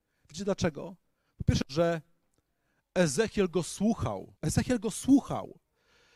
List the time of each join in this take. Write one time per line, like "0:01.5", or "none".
0:01.6
0:04.4